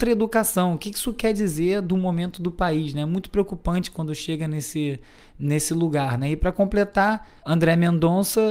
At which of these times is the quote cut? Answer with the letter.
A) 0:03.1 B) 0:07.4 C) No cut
B